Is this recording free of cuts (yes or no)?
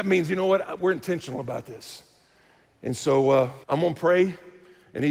no